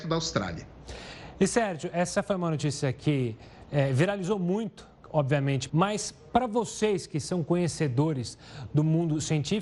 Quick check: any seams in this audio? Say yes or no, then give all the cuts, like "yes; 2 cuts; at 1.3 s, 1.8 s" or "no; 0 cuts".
yes; 1 cut; at 5.7 s